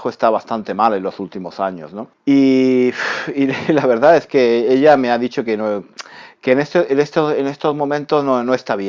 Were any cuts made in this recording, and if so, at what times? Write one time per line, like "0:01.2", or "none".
0:02.1